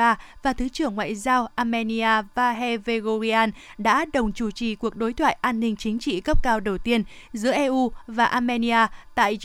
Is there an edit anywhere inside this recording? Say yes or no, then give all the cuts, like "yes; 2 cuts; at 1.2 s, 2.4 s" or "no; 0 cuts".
no; 0 cuts